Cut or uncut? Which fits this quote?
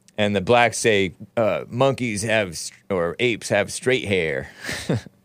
cut